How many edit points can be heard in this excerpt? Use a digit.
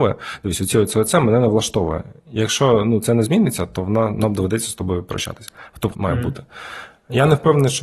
1